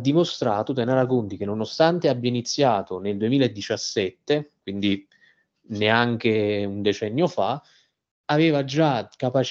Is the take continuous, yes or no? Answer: yes